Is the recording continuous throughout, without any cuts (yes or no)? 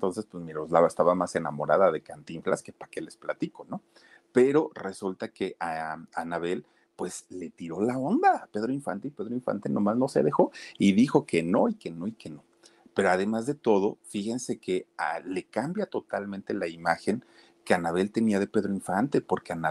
yes